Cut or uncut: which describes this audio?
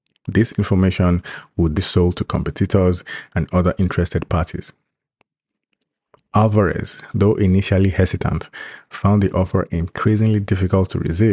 cut